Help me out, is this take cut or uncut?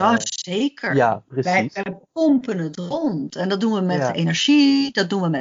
uncut